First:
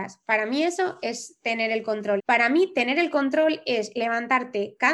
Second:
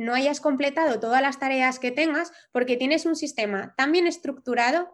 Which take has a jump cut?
first; 1 cut; at 2.2 s

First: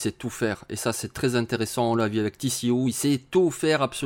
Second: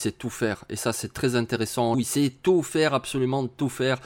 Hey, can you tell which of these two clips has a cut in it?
second; 1 cut; at 1.9 s

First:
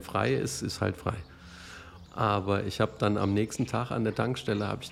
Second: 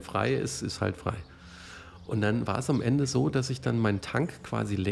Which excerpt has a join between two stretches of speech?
first; 1 cut; at 2.1 s

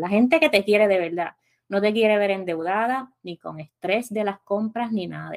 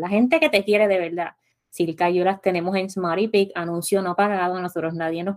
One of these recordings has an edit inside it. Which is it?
second; 1 cut; at 1.5 s

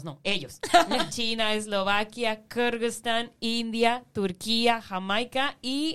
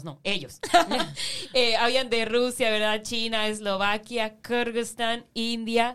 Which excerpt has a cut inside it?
first; 1 cut; at 1.1 s

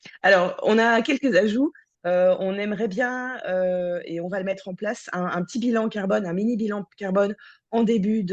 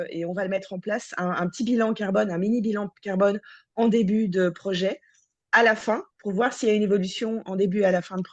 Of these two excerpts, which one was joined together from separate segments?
first; 1 cut; at 1.9 s

